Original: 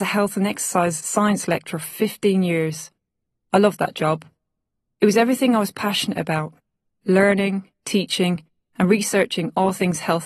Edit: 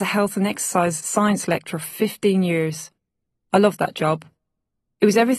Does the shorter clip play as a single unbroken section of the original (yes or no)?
yes